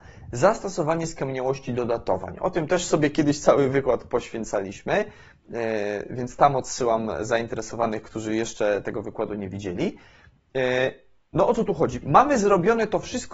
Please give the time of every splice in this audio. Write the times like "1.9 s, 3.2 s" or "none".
12.0 s